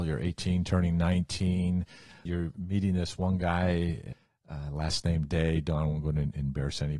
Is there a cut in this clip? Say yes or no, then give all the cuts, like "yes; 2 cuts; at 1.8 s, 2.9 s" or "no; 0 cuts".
no; 0 cuts